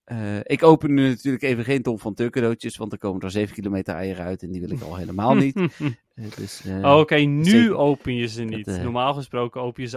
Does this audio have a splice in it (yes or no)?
no